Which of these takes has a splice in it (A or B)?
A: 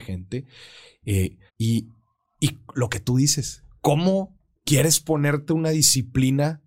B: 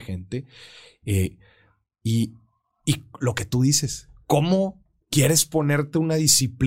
A